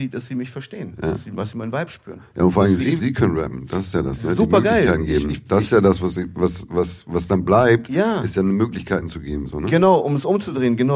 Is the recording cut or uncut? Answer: cut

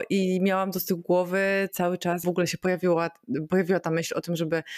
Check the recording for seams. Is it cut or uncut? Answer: cut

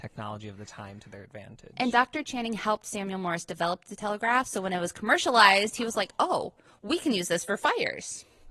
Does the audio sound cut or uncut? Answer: uncut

